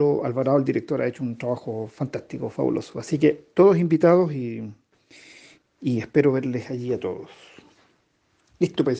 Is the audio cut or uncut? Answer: uncut